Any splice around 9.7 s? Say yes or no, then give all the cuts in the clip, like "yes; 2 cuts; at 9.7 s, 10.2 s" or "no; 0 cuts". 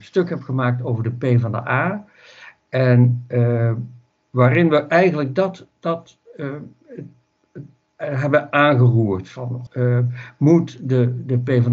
yes; 1 cut; at 9.7 s